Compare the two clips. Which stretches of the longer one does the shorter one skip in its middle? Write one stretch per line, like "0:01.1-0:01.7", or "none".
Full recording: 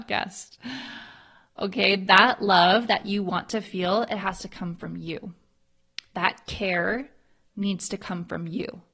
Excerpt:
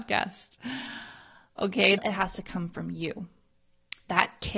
0:02.0-0:04.0